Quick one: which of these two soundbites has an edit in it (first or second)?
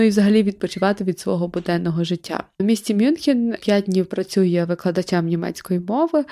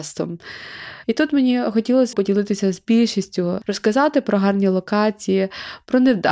second